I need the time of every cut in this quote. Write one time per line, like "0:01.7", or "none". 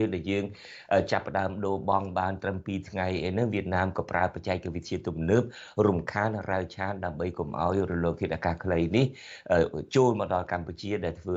none